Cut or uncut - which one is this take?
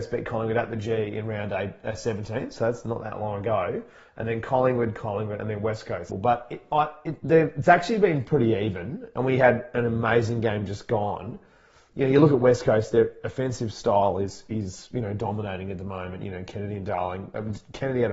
cut